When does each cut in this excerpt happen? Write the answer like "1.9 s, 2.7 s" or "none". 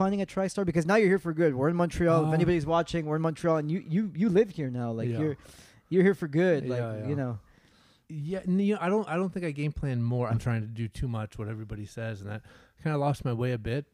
8.0 s, 10.3 s